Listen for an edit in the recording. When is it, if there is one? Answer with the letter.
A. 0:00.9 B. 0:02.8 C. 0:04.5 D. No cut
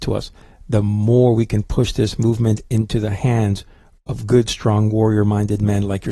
D